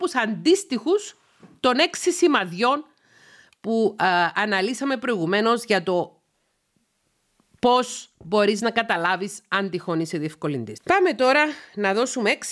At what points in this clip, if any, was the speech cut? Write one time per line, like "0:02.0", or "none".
0:10.8